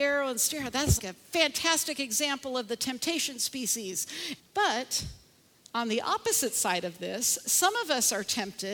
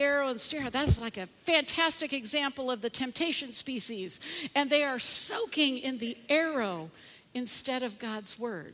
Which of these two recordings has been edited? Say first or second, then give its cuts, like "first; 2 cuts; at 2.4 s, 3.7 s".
first; 2 cuts; at 1.0 s, 4.4 s